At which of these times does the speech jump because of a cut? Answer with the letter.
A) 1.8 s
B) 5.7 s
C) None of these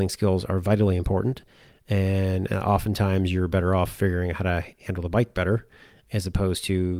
C